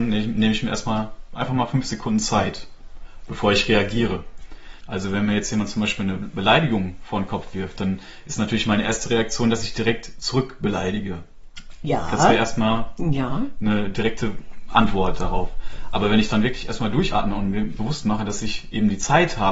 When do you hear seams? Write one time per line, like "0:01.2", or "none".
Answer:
0:04.8
0:17.8